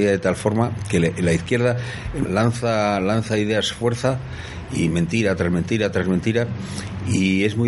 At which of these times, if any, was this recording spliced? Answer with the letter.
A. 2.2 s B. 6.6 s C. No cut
A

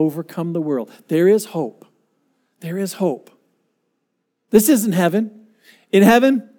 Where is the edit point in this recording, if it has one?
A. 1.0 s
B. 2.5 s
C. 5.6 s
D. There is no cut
D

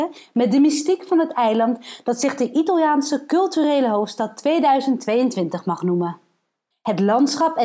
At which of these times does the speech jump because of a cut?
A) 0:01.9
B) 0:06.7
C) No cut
B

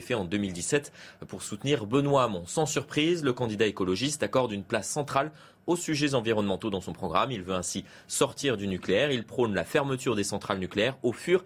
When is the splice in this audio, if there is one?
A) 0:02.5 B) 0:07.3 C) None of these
C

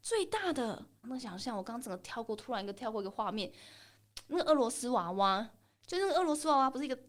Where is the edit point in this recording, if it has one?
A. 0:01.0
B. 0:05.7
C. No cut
A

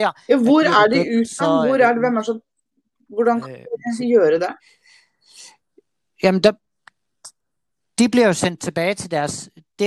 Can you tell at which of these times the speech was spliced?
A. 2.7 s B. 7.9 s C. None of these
C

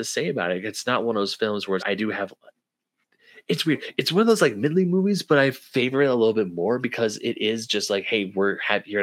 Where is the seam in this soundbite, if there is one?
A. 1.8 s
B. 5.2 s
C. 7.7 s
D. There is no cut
A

